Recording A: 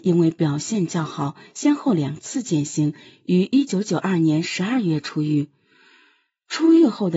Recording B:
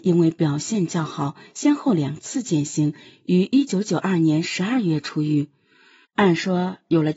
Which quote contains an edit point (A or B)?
B